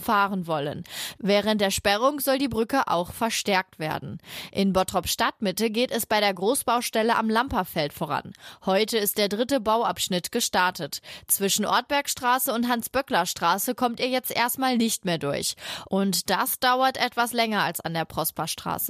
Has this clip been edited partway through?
no; 0 cuts

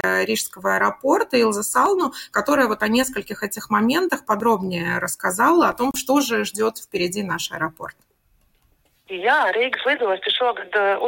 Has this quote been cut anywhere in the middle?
no; 0 cuts

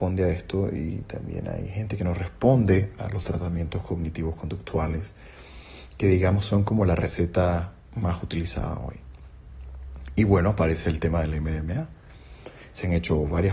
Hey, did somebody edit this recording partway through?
no; 0 cuts

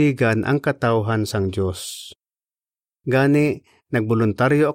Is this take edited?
no; 0 cuts

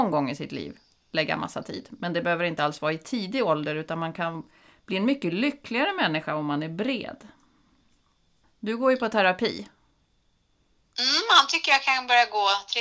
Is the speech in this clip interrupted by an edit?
no; 0 cuts

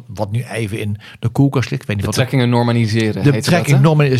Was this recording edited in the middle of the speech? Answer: no; 0 cuts

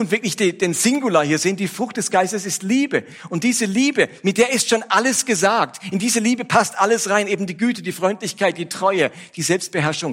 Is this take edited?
no; 0 cuts

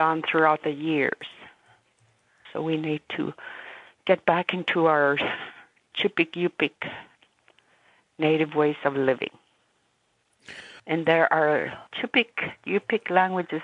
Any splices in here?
yes; 3 cuts; at 2.5 s, 10.8 s, 11.9 s

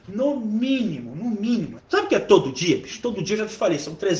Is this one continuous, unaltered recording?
no; 1 cut; at 1.8 s

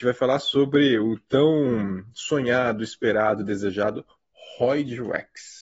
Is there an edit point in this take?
no; 0 cuts

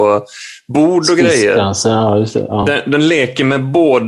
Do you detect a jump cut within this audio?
no; 0 cuts

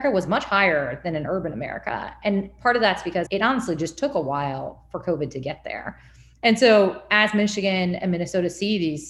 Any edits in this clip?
yes; 1 cut; at 3.3 s

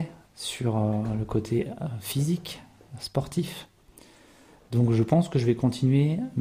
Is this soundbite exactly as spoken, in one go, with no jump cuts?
yes; 0 cuts

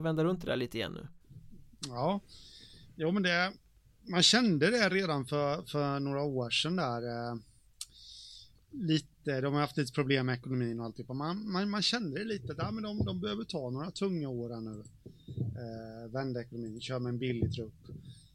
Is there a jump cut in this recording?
no; 0 cuts

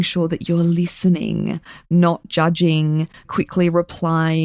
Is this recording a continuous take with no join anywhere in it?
no; 1 cut; at 3.2 s

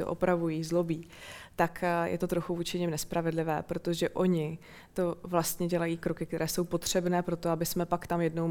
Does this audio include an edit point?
no; 0 cuts

